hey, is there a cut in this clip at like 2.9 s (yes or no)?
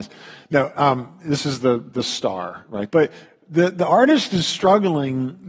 yes